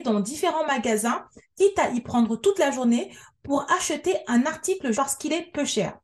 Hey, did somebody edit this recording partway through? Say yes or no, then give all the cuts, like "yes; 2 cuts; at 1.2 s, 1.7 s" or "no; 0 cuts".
yes; 1 cut; at 4.9 s